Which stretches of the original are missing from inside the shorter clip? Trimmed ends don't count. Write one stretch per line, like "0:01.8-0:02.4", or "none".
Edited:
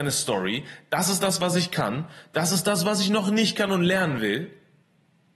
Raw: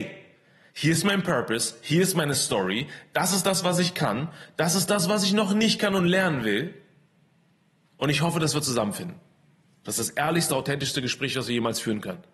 none

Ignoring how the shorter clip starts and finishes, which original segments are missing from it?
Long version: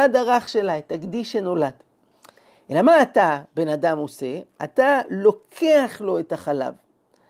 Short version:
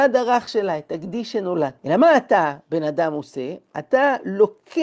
0:01.8-0:02.6

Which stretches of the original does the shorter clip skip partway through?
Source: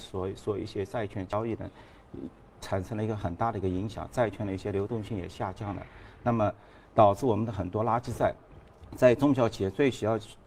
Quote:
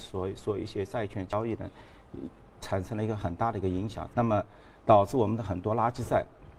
0:04.1-0:06.2

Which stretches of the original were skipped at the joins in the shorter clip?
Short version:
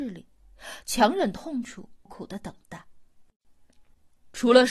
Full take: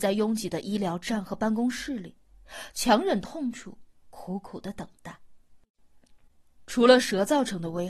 0:03.9-0:04.4

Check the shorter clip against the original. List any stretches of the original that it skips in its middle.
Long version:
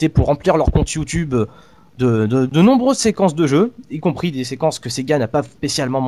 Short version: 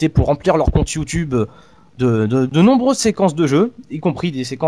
none

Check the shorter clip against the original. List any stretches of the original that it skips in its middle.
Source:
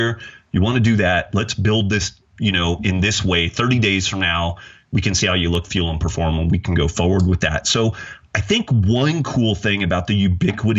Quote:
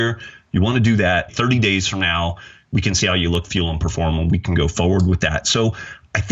0:01.3-0:03.5

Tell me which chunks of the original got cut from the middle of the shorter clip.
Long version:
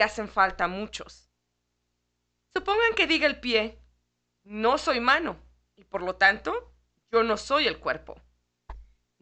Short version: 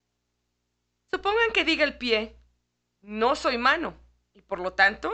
none

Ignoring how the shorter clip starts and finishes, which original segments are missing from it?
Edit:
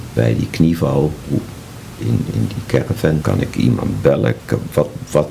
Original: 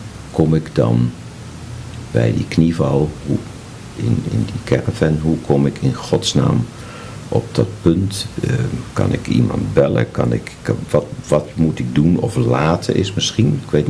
0:05.2-0:08.9
0:10.1-0:10.6

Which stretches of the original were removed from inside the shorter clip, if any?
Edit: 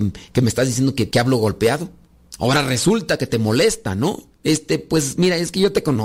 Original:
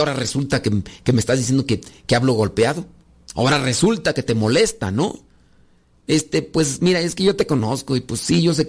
0:01.8-0:02.1
0:05.3-0:06.0

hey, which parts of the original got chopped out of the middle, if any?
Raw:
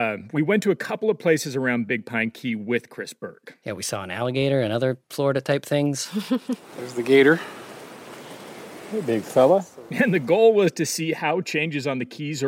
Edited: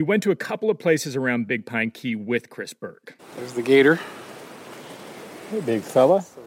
0:03.6-0:06.6

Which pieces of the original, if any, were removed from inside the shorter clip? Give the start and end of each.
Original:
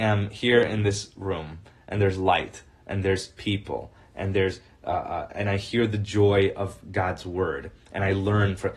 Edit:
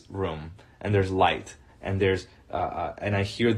0:02.8-0:04.0

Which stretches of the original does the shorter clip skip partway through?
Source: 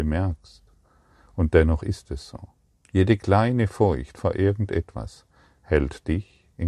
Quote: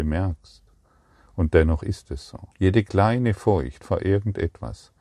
0:02.5-0:02.8

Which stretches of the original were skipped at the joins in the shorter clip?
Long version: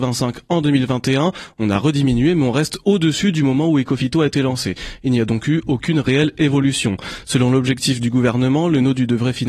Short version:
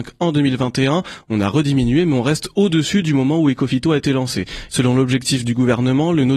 0:05.0-0:07.2

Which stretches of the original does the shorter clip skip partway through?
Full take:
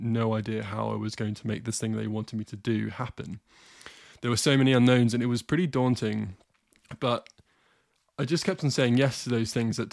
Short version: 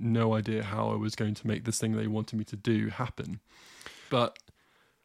0:04.1-0:07.0

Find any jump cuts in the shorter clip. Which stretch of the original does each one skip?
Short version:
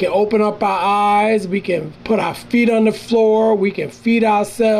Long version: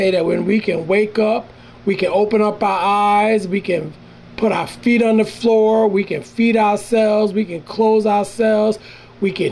0:04.0-0:04.3

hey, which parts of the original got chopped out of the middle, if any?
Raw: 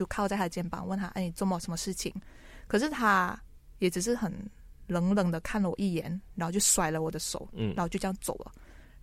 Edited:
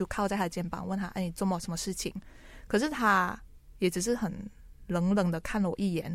none

